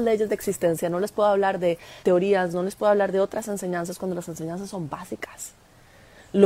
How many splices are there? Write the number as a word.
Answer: one